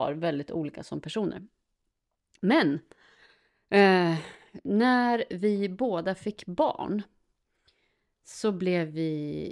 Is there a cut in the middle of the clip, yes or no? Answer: no